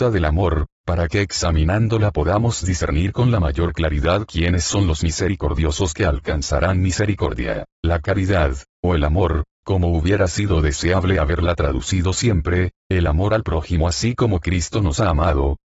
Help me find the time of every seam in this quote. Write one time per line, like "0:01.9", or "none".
0:12.8